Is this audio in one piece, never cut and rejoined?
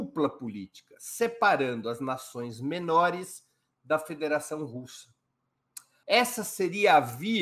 no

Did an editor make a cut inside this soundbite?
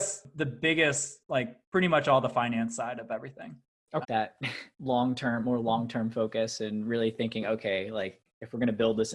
yes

